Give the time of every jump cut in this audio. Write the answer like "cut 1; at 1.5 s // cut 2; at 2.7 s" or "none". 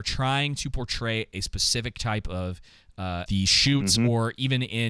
cut 1; at 3.3 s